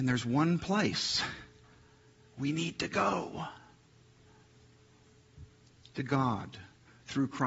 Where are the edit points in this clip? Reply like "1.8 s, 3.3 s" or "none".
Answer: none